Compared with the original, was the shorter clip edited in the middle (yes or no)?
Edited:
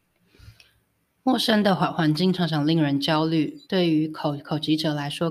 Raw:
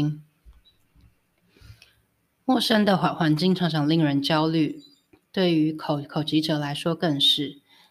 yes